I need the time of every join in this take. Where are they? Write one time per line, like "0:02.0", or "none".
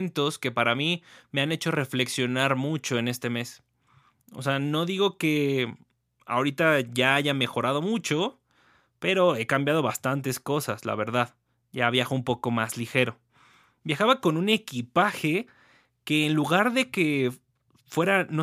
0:04.2